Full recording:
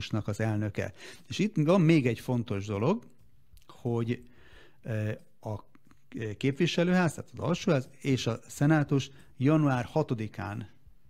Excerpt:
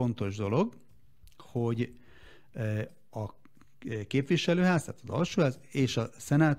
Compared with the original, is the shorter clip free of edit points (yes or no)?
yes